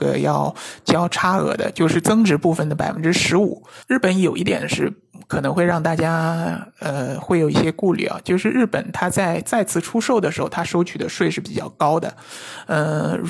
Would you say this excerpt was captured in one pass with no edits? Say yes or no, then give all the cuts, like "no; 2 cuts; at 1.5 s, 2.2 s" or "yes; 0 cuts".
no; 1 cut; at 3.8 s